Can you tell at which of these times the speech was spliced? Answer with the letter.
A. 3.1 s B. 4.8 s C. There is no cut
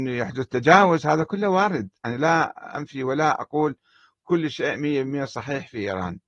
C